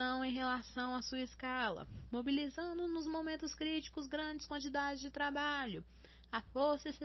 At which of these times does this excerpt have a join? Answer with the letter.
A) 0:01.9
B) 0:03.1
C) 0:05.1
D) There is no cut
D